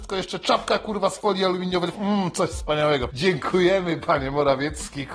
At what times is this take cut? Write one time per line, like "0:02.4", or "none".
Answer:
0:01.9
0:03.1